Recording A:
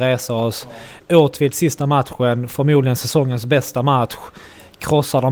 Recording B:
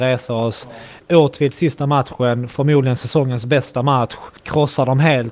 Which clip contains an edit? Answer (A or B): B